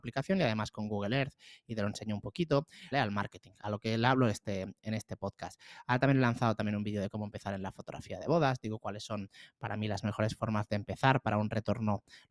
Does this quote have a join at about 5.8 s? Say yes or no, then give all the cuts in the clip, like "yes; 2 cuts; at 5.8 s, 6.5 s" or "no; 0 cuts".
no; 1 cut; at 2.9 s